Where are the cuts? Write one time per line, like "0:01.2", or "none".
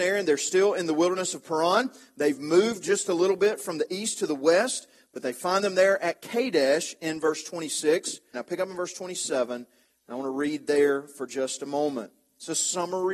0:08.3